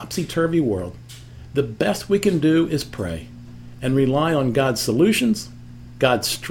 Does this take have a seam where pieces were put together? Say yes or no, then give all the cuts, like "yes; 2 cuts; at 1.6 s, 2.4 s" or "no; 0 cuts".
no; 0 cuts